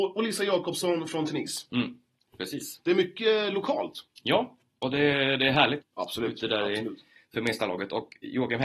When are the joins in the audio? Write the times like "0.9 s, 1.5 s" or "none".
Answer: 5.8 s